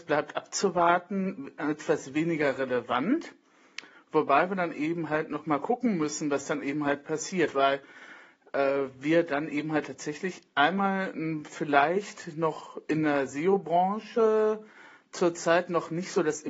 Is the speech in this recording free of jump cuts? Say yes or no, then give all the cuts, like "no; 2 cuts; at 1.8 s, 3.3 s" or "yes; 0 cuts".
yes; 0 cuts